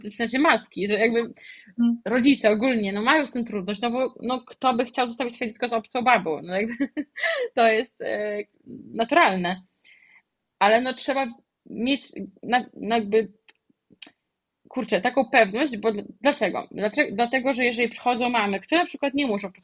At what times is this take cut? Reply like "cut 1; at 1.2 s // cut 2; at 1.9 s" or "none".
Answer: none